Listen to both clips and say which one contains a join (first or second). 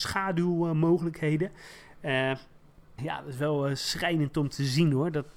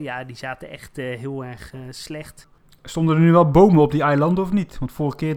first